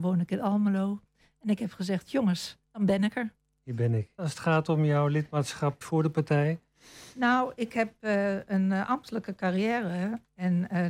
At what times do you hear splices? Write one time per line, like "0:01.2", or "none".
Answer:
0:02.6
0:04.2
0:05.8